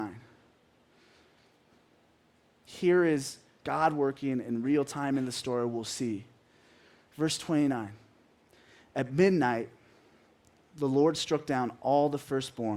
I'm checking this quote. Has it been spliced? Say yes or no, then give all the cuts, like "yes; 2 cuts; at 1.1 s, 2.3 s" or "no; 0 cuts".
no; 0 cuts